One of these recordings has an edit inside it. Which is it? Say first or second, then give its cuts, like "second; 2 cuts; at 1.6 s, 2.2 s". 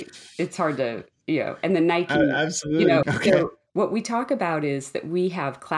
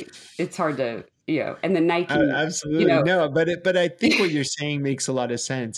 first; 1 cut; at 3.0 s